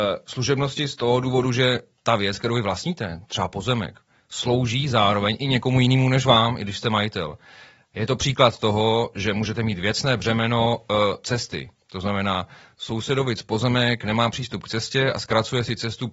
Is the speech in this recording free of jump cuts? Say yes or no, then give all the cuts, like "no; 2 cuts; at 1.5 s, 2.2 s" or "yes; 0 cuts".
yes; 0 cuts